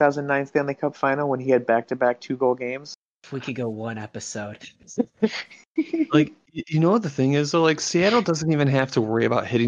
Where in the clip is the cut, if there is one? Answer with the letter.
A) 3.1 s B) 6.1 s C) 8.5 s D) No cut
A